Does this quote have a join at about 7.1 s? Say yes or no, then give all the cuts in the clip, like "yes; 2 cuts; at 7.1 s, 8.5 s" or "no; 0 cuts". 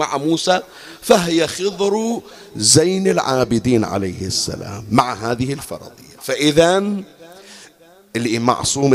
no; 0 cuts